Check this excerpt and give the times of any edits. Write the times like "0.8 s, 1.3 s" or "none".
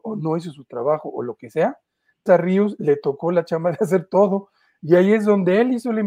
2.3 s